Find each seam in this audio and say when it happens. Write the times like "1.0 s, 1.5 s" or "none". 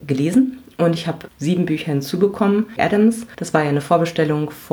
2.8 s